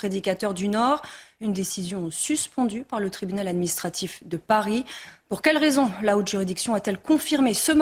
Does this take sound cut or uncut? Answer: uncut